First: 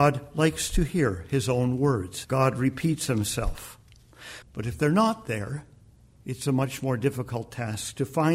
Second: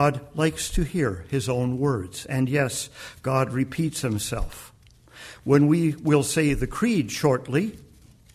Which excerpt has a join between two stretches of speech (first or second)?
first